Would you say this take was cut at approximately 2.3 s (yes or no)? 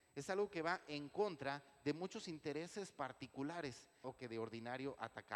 no